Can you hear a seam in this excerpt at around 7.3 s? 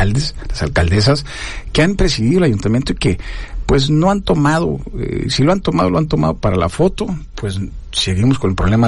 yes; 1 cut; at 7.3 s

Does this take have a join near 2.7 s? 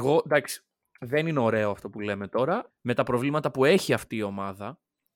yes; 1 cut; at 2.7 s

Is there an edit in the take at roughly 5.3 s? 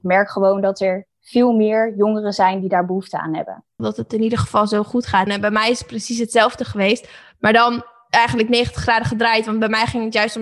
yes; 2 cuts; at 3.8 s, 5.3 s

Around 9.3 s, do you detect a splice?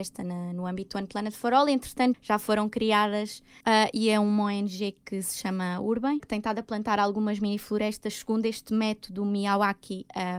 no; 3 cuts; at 2.1 s, 3.6 s, 6.2 s

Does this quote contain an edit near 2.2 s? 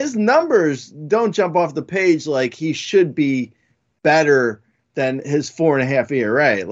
no; 0 cuts

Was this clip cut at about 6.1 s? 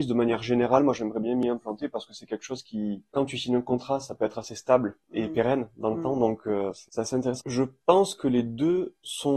no; 1 cut; at 7.4 s

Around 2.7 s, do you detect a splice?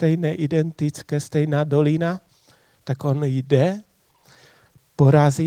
yes; 1 cut; at 2.7 s

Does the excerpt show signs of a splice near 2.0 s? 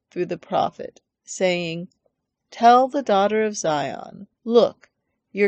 no; 1 cut; at 4.4 s

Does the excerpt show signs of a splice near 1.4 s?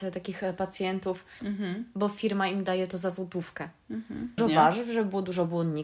yes; 2 cuts; at 1.4 s, 4.4 s

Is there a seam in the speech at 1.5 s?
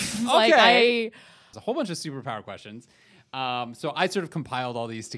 yes; 1 cut; at 1.5 s

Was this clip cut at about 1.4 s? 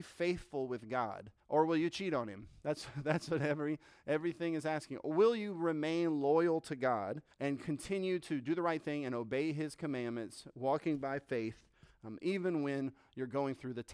yes; 2 cuts; at 1.4 s, 7.3 s

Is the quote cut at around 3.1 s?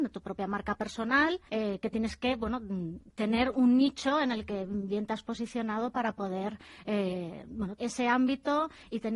no; 2 cuts; at 1.5 s, 7.8 s

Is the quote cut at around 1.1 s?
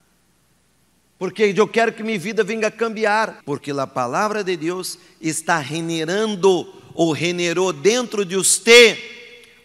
no; 1 cut; at 3.4 s

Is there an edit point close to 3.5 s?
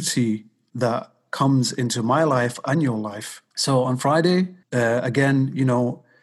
yes; 2 cuts; at 3.5 s, 4.6 s

